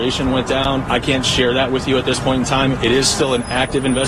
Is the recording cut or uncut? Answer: uncut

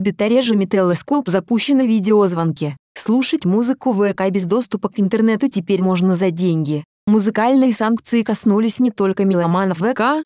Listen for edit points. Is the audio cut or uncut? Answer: cut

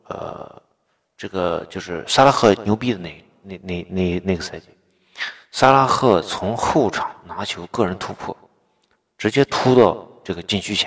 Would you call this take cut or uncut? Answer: uncut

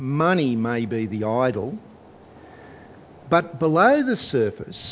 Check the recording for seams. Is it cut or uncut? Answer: uncut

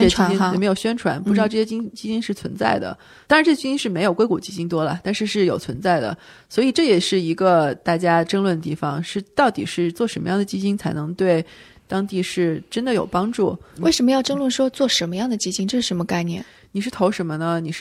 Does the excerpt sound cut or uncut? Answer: uncut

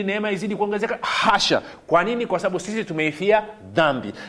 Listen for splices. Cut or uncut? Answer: uncut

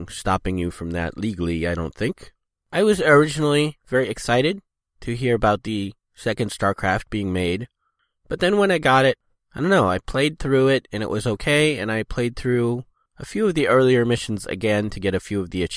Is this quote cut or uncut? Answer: cut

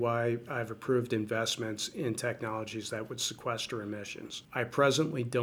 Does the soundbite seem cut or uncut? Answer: cut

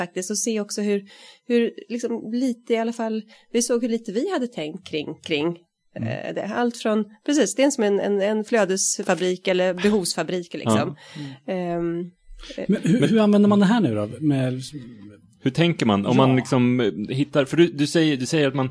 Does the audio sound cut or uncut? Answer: uncut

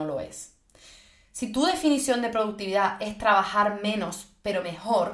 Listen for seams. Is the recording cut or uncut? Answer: uncut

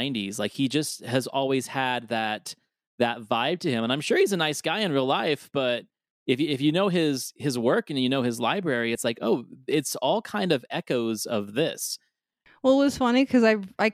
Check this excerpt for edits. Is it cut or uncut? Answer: uncut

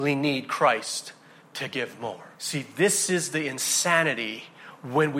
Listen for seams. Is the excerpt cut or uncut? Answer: cut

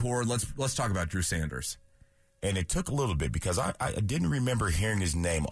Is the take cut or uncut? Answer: cut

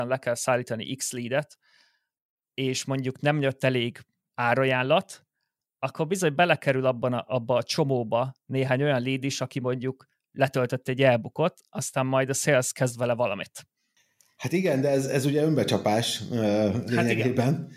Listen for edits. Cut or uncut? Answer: uncut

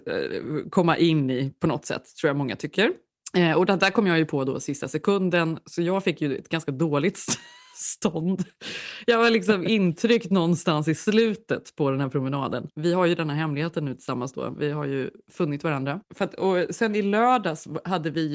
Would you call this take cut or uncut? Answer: cut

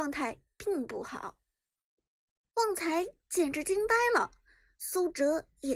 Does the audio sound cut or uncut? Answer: cut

